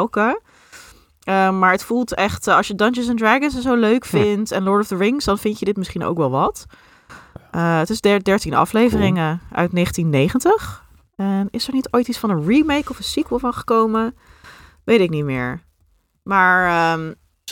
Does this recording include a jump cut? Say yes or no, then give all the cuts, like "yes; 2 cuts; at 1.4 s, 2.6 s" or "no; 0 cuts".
no; 0 cuts